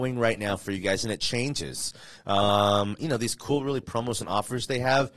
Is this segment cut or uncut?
cut